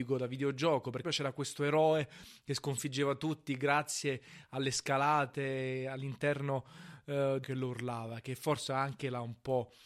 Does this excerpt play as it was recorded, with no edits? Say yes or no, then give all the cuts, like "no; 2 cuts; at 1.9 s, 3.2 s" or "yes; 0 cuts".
no; 2 cuts; at 1.0 s, 7.4 s